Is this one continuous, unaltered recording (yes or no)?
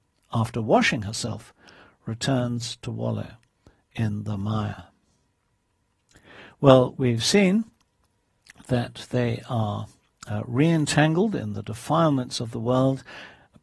yes